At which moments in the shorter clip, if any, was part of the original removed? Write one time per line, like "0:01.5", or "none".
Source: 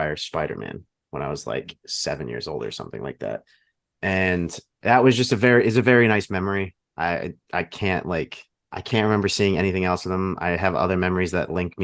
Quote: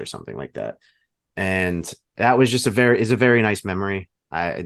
none